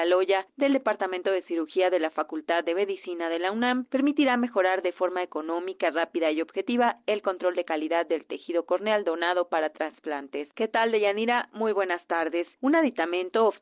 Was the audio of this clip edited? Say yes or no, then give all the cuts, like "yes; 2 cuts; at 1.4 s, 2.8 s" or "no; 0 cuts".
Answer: yes; 1 cut; at 10.5 s